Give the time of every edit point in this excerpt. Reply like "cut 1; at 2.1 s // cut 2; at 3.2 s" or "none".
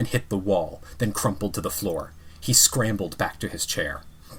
none